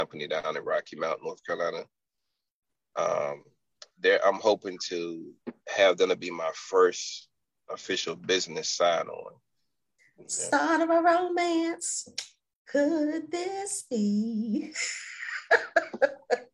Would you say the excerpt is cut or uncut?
cut